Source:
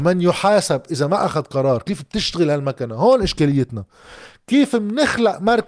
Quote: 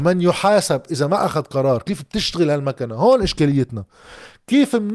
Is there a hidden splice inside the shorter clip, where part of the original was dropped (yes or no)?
no